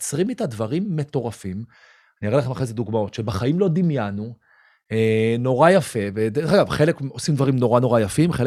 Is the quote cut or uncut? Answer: uncut